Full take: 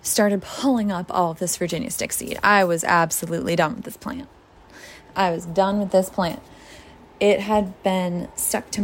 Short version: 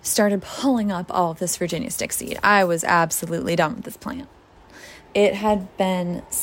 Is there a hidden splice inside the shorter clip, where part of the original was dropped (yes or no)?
yes